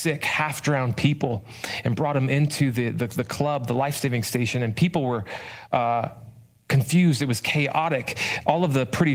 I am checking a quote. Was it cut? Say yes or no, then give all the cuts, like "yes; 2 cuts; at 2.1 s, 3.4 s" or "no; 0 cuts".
no; 0 cuts